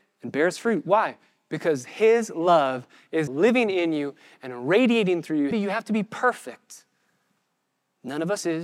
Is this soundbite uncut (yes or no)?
no